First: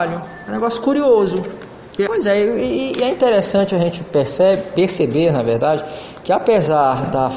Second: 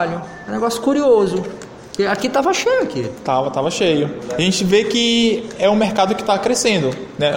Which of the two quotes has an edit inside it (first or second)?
first